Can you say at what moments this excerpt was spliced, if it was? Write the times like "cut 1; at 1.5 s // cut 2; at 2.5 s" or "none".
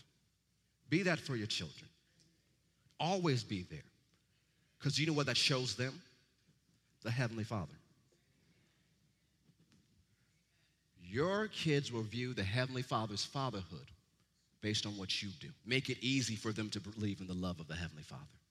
cut 1; at 15.6 s